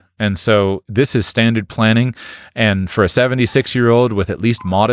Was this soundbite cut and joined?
no; 0 cuts

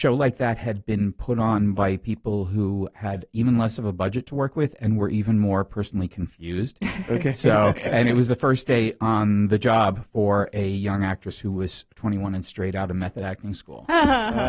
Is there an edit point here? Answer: no; 0 cuts

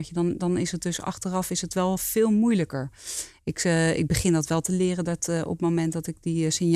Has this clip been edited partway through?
no; 0 cuts

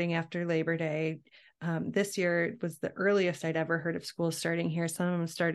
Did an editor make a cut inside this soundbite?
no; 0 cuts

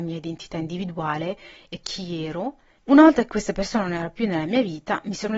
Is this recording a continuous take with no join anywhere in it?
yes; 0 cuts

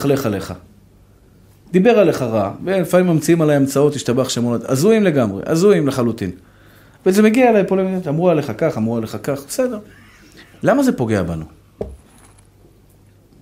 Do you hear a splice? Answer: no; 0 cuts

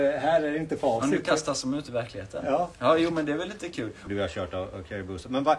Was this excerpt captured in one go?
no; 1 cut; at 4.1 s

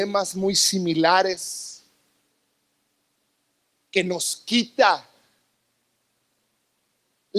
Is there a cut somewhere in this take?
no; 0 cuts

